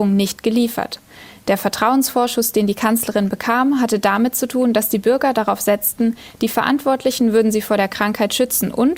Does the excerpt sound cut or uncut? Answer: uncut